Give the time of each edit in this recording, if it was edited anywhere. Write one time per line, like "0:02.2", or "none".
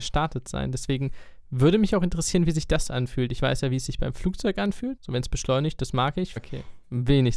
0:05.0
0:06.4